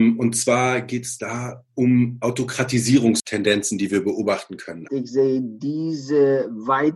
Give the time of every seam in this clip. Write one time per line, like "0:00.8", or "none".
0:04.9